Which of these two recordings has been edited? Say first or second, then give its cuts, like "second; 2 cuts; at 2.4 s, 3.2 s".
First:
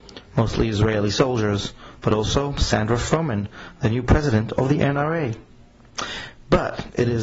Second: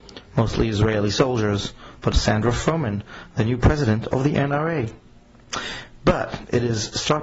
second; 1 cut; at 2.1 s